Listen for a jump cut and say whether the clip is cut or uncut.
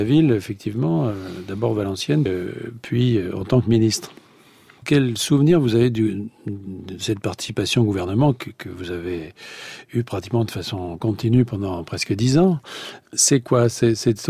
cut